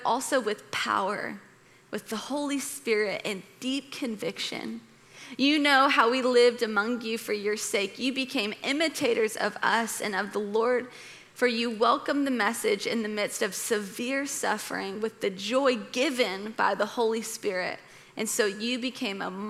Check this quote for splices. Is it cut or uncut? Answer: uncut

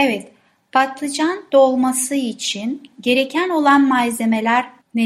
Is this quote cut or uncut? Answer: uncut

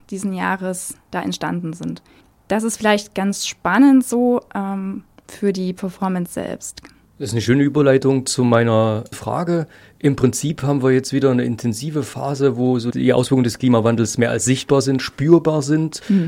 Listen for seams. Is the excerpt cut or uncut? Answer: uncut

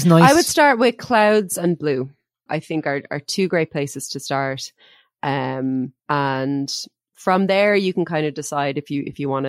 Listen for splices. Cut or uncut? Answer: cut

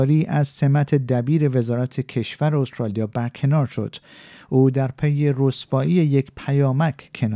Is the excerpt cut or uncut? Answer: uncut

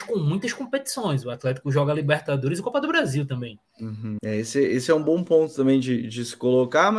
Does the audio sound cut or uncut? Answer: cut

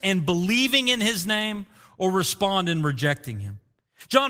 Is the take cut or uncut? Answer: uncut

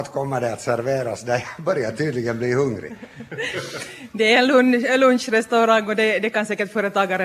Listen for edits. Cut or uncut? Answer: uncut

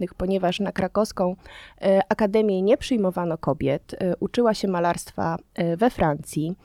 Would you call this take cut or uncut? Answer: uncut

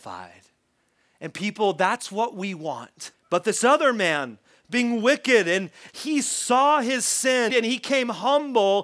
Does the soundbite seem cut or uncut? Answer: cut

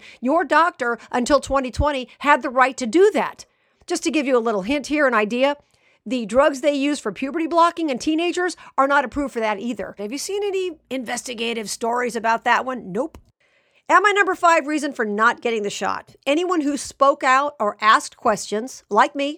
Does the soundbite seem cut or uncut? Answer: cut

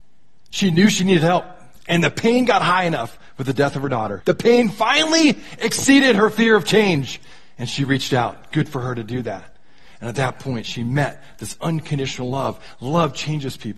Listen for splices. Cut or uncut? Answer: cut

